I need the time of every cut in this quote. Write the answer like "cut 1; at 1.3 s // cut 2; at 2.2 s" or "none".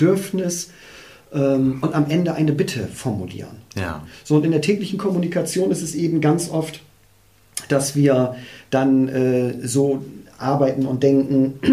none